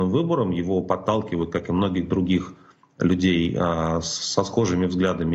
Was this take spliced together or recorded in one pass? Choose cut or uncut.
uncut